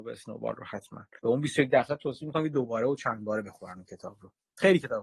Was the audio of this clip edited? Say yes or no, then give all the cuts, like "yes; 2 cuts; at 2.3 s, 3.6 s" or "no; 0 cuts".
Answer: yes; 1 cut; at 1.2 s